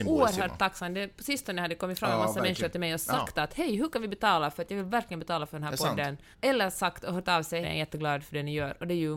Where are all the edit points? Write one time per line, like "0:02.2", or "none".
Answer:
0:06.3
0:07.6